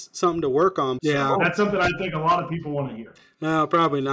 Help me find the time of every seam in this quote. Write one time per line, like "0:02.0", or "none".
0:01.0